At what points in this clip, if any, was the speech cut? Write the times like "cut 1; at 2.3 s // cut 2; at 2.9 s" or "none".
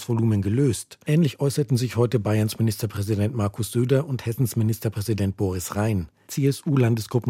cut 1; at 1.1 s // cut 2; at 6.3 s